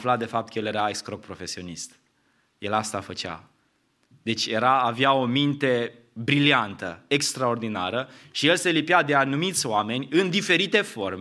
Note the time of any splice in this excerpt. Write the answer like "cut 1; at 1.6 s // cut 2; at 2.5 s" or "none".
none